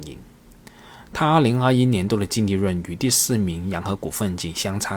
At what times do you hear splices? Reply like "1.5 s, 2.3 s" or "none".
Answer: none